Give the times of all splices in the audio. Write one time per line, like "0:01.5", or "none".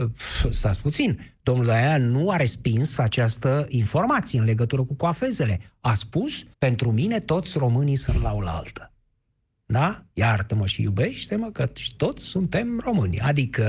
0:06.5